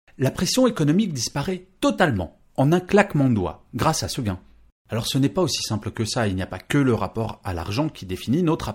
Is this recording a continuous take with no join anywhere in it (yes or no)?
no